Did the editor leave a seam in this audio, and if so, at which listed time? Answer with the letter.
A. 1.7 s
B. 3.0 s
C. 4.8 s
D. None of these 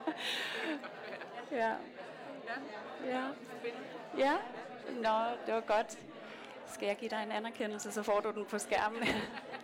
C